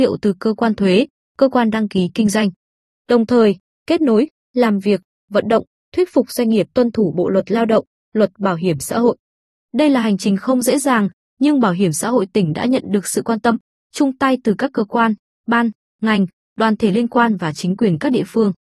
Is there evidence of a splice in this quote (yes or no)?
no